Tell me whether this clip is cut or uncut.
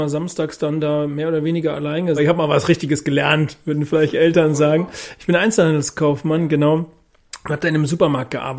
cut